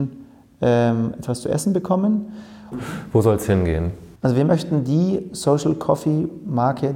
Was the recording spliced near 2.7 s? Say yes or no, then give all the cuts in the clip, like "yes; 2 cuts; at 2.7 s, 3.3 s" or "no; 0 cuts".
yes; 2 cuts; at 2.7 s, 4.2 s